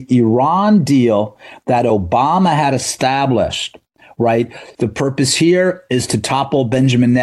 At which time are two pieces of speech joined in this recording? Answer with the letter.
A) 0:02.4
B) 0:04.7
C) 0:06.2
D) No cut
B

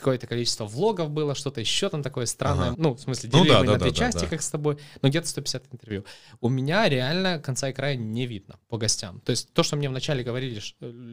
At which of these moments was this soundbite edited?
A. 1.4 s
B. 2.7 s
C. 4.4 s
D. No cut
B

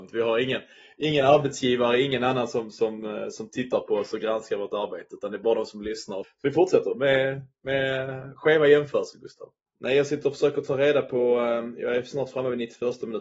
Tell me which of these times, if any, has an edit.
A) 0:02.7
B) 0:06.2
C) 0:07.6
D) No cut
B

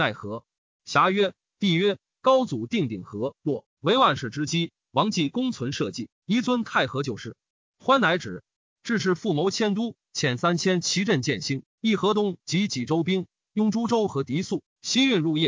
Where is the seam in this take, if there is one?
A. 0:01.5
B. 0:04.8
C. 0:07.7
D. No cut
A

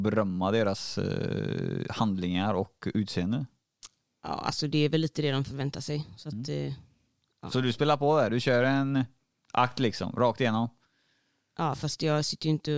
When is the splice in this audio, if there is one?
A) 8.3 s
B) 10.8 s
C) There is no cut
C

